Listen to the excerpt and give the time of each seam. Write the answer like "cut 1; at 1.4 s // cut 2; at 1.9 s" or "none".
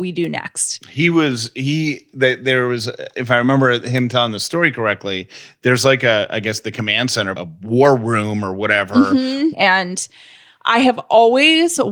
cut 1; at 7.3 s // cut 2; at 9.5 s